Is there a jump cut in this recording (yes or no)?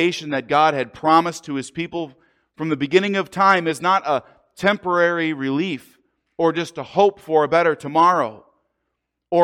no